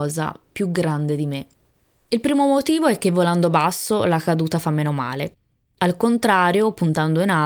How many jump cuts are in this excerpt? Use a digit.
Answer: 0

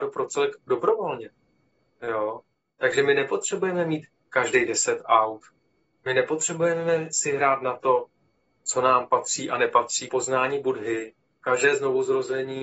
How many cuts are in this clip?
3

